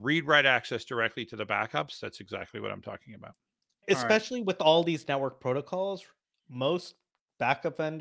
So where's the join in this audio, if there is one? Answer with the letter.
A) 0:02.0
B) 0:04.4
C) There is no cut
A